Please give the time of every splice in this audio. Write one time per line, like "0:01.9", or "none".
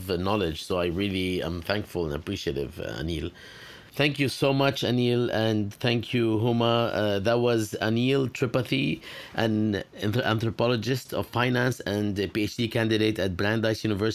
none